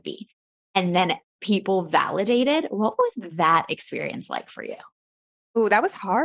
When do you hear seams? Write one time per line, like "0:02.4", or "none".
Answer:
none